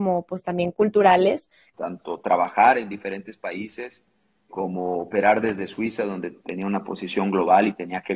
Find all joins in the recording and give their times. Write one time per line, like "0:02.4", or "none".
0:01.7
0:04.5